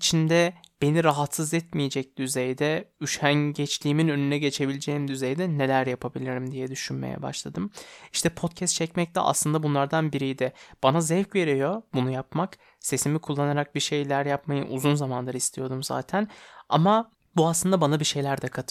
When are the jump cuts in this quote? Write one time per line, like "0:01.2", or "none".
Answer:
none